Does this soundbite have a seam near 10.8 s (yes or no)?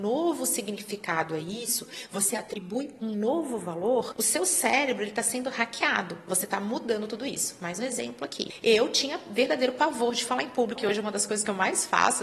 yes